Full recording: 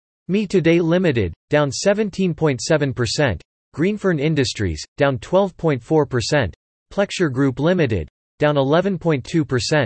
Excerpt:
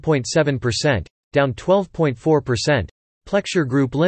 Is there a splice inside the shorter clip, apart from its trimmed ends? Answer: yes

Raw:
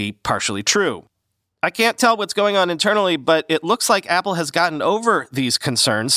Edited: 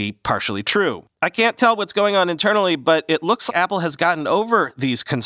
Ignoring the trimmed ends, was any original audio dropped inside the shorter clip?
yes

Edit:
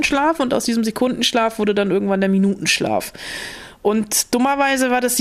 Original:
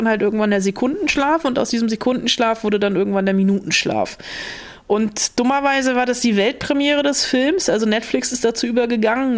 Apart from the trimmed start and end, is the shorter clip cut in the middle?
no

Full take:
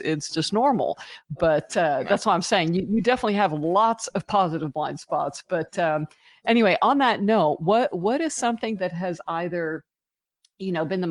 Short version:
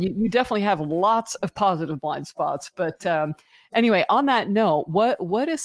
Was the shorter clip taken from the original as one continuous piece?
yes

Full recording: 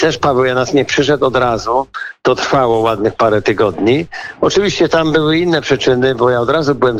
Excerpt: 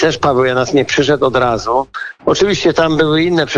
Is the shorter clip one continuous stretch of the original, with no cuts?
no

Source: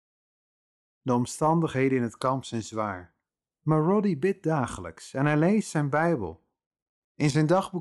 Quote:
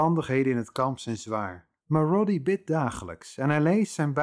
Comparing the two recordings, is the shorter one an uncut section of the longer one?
no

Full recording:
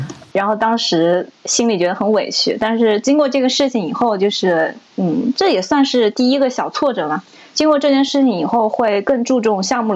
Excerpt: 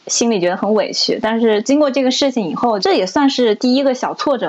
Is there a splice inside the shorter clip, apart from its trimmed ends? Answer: yes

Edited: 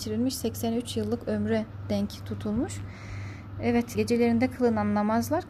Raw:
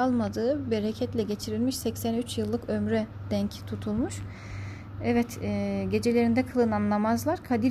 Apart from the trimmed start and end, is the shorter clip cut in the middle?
yes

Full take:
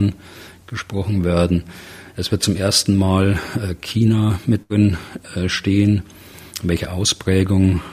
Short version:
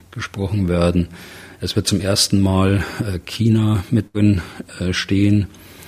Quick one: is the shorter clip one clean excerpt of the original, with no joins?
yes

